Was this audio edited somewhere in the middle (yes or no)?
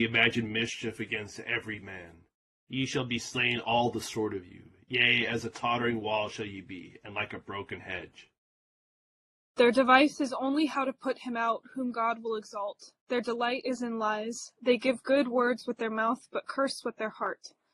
no